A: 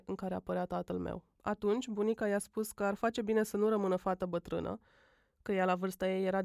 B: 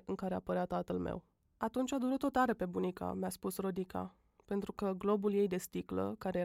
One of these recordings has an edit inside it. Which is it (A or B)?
A